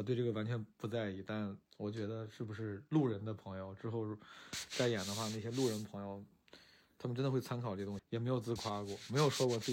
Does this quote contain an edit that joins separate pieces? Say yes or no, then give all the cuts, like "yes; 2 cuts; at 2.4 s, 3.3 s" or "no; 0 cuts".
yes; 2 cuts; at 1.7 s, 8.0 s